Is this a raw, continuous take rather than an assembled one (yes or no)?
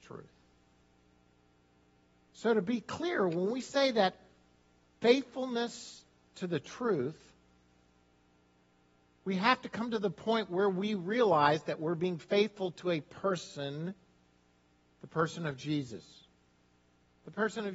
yes